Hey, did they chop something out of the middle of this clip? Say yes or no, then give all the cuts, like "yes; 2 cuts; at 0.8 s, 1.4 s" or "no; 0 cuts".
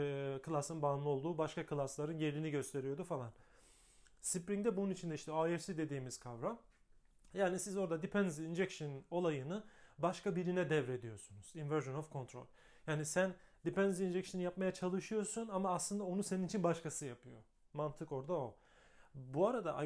no; 0 cuts